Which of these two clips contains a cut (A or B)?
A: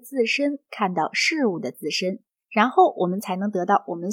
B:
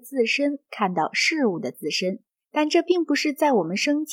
B